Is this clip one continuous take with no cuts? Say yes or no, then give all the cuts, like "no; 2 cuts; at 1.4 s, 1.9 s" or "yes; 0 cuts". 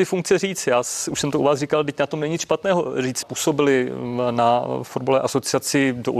no; 1 cut; at 3.2 s